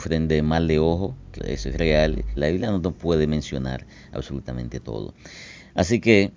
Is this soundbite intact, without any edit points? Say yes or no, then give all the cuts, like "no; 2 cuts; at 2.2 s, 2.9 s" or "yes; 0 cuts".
no; 2 cuts; at 1.4 s, 2.4 s